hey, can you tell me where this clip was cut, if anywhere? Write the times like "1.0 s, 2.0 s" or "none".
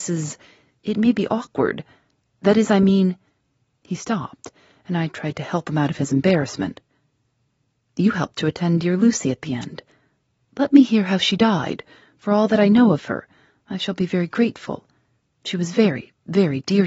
none